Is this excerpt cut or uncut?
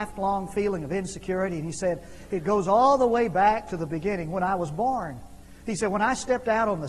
uncut